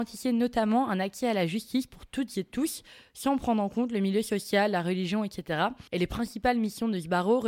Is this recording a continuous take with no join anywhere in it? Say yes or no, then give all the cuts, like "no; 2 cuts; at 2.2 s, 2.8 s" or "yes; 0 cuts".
no; 1 cut; at 5.9 s